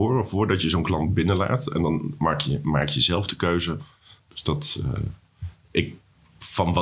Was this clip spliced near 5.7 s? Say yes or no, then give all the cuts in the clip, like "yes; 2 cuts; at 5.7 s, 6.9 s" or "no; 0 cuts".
no; 1 cut; at 4.2 s